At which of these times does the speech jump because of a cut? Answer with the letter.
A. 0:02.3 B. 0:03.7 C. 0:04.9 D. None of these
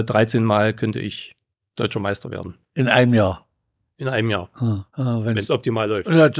C